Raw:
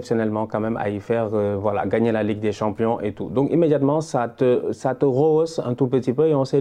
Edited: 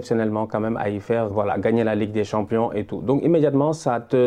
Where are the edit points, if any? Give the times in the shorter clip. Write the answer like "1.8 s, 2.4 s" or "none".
1.3 s

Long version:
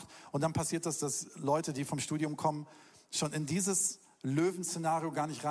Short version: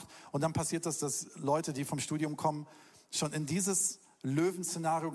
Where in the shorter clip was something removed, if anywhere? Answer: none

